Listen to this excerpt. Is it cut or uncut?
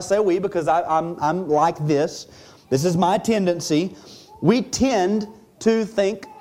uncut